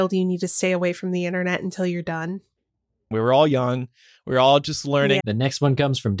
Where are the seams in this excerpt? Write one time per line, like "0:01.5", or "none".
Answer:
0:03.1
0:05.2